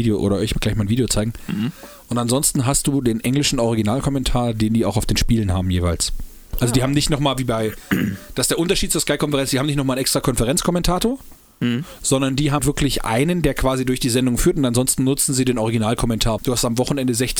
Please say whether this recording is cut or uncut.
cut